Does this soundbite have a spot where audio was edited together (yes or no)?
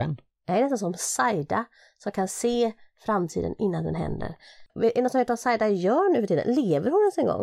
yes